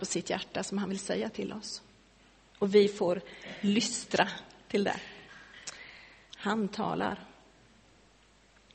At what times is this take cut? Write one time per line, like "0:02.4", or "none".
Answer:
0:06.3